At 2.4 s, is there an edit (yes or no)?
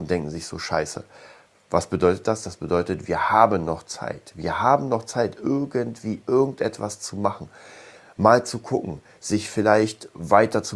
no